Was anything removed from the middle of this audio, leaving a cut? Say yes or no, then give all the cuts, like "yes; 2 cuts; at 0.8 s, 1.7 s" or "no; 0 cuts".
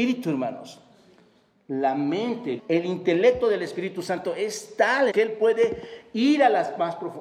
yes; 2 cuts; at 2.6 s, 5.1 s